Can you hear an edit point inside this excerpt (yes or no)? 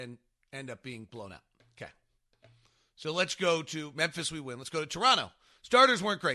no